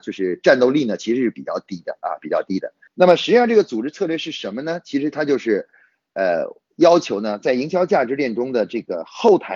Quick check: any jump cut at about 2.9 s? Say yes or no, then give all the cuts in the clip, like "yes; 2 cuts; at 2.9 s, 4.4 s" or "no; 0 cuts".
yes; 1 cut; at 2.9 s